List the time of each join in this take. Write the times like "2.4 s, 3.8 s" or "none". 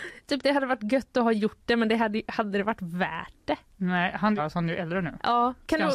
4.4 s